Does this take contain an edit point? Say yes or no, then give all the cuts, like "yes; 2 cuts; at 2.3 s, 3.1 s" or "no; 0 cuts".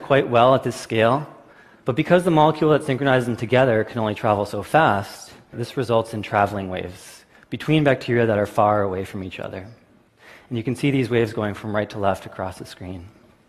yes; 1 cut; at 5.5 s